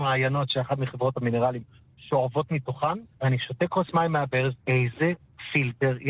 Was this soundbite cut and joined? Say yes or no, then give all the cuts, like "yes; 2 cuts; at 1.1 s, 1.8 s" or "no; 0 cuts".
yes; 2 cuts; at 3.1 s, 4.6 s